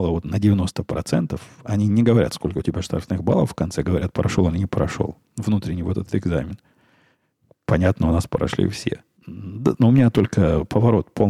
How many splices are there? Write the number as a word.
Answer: one